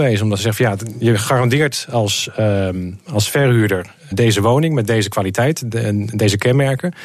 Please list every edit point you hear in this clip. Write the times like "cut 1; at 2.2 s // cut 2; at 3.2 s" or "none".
cut 1; at 4.1 s